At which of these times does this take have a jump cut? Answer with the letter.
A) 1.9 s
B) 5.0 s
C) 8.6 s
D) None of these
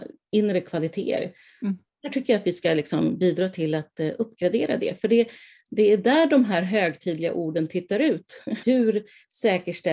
C